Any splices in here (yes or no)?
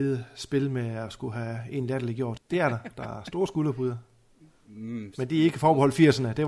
yes